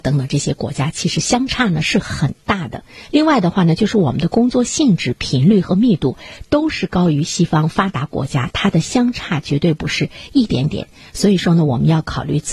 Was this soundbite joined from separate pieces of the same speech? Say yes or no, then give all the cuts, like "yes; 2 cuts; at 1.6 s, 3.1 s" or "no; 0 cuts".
no; 0 cuts